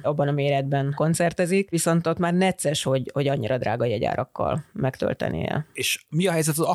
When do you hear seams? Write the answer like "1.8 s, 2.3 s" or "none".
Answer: none